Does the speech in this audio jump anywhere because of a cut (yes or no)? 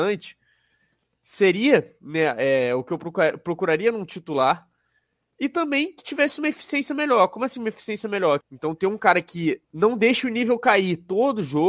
yes